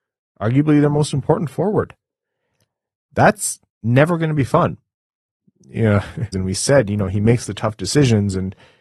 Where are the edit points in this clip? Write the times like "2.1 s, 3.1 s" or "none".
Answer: 6.3 s

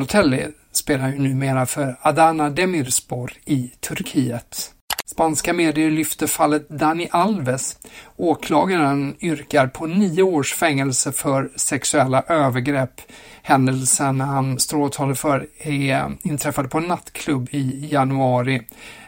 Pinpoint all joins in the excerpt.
5.0 s

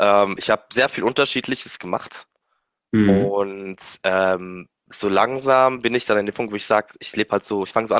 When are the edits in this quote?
none

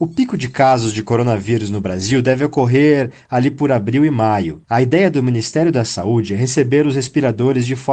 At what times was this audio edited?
none

